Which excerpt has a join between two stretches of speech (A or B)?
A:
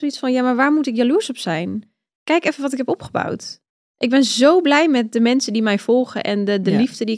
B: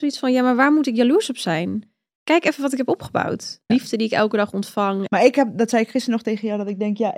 B